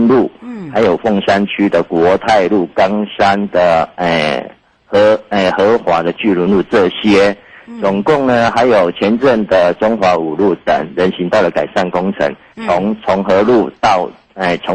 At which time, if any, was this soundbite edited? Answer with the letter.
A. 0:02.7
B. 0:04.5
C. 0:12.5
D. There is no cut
C